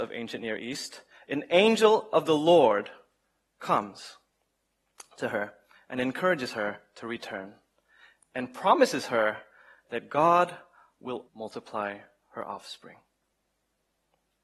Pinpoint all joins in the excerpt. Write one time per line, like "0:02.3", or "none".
0:11.3